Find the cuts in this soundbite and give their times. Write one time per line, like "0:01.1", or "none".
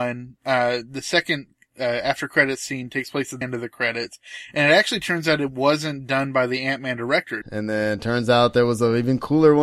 0:03.4
0:07.4